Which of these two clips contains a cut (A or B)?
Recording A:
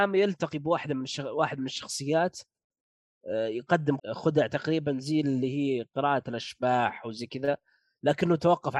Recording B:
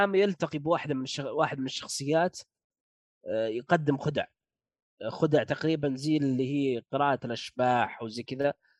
A